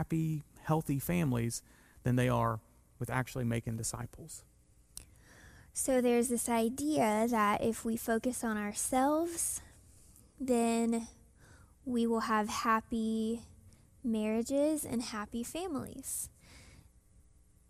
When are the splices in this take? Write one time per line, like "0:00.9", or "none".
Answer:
none